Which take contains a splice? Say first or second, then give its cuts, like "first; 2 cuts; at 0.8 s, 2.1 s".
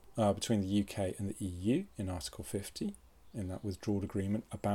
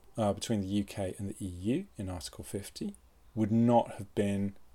second; 1 cut; at 3.3 s